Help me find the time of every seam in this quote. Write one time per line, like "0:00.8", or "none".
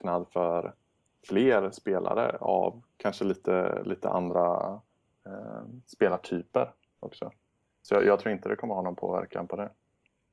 none